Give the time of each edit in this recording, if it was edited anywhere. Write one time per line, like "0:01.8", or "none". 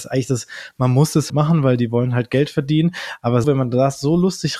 0:01.3
0:03.4